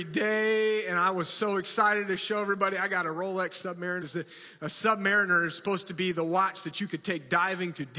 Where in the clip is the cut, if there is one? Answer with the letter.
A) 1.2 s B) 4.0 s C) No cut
B